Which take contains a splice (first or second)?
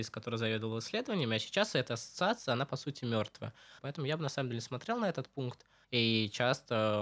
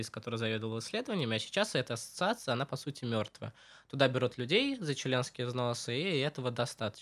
first